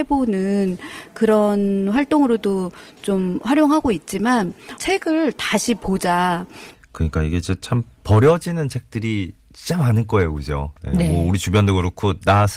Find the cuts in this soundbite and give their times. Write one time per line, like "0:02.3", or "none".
0:06.7